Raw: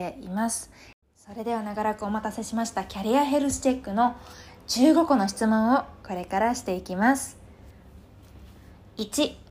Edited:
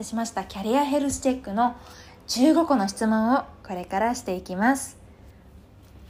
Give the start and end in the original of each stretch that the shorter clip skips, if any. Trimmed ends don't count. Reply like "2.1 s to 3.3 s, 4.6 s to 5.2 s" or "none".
none